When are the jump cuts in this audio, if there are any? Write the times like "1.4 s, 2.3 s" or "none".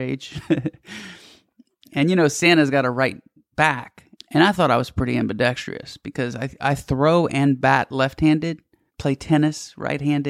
4.1 s, 8.9 s